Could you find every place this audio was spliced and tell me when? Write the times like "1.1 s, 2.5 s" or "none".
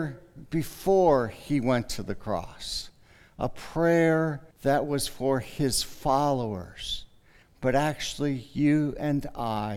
4.5 s, 7.4 s